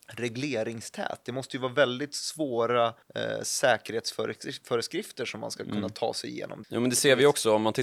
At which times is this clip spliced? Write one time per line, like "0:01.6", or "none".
0:03.0
0:06.6